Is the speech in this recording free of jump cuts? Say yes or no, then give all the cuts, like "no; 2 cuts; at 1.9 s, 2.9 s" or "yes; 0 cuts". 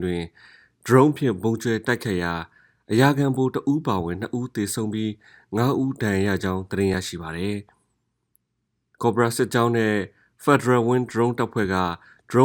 yes; 0 cuts